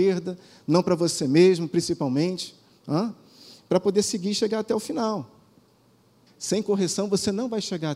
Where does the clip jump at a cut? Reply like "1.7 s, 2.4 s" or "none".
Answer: 6.3 s